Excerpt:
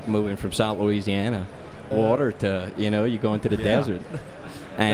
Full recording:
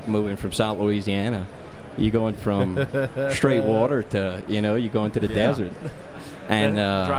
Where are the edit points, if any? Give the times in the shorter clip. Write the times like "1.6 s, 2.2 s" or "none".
1.9 s